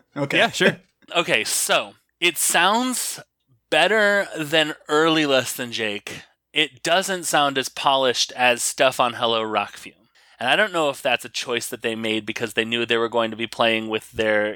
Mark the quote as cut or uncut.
uncut